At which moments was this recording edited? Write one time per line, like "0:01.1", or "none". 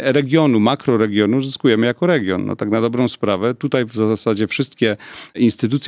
none

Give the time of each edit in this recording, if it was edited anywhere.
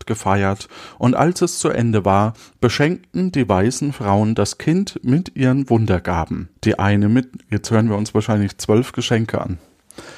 0:06.6

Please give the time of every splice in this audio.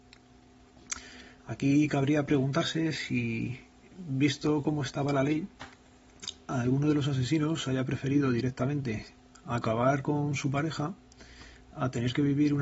0:01.4

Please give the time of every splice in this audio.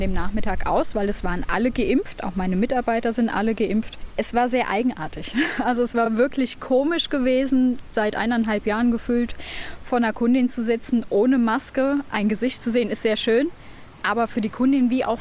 none

